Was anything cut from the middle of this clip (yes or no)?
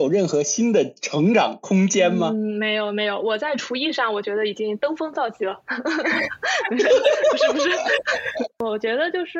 no